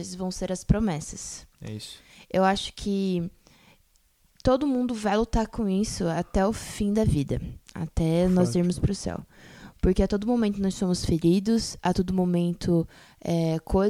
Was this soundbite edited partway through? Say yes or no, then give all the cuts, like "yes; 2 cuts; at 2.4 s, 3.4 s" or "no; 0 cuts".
no; 0 cuts